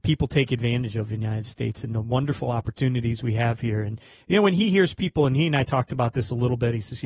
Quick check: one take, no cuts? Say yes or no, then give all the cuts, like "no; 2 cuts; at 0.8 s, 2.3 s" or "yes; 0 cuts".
yes; 0 cuts